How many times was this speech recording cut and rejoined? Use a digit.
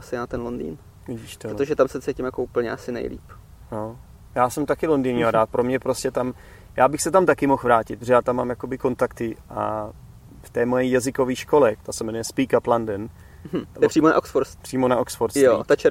2